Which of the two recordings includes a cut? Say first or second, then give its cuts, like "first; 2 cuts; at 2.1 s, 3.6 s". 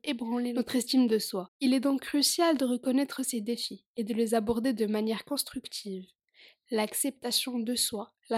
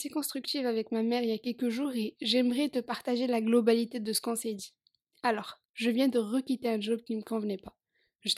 second; 1 cut; at 5.6 s